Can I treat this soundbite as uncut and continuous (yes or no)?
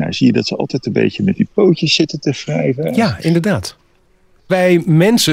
no